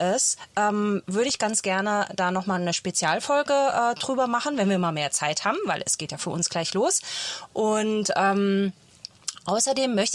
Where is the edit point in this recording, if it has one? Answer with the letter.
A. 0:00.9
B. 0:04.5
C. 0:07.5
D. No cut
D